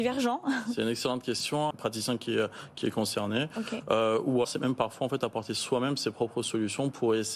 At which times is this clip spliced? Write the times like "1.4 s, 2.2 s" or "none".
1.7 s, 4.4 s